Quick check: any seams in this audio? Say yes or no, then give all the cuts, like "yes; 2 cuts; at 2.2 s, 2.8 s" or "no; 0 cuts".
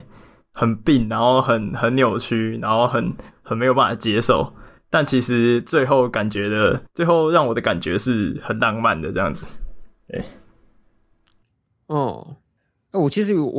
no; 0 cuts